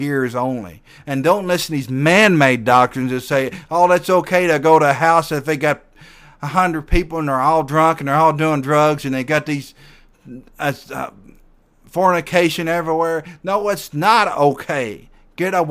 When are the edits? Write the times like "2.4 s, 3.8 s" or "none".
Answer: 1.0 s